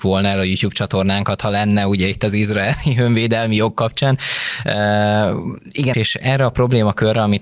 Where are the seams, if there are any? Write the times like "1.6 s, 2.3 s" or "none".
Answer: 5.9 s